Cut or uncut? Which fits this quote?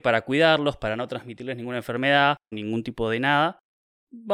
cut